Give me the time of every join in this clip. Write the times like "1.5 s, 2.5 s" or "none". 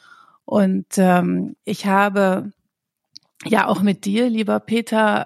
1.6 s